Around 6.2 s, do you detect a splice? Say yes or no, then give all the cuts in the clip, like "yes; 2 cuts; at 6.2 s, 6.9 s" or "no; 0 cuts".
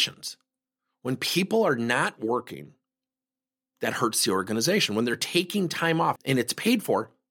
yes; 1 cut; at 6.2 s